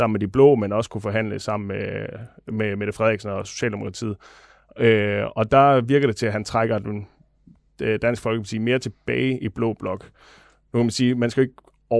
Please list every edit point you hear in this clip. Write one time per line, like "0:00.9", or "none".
none